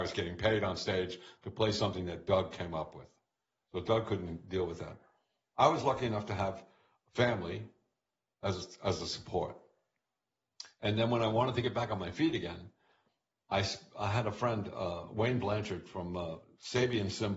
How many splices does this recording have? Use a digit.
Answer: 0